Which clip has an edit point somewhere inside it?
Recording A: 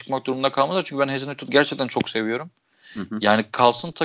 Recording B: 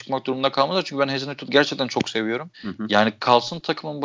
B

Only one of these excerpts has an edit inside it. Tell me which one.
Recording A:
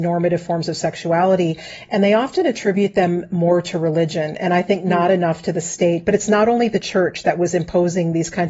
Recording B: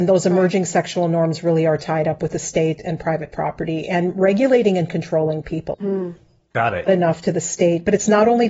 B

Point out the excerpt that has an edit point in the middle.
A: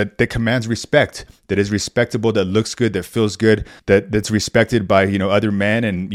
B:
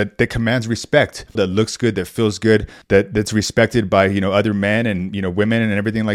B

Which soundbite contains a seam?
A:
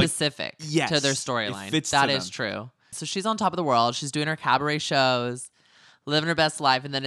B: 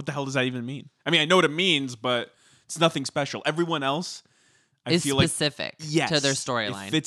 A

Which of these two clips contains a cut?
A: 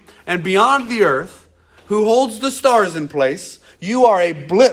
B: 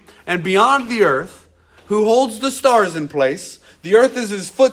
A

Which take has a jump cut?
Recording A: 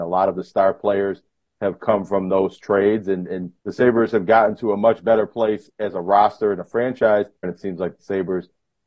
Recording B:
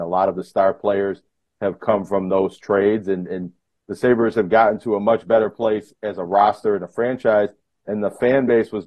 A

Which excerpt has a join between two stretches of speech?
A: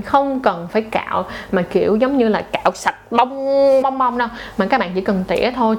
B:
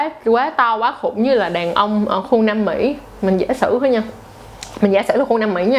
A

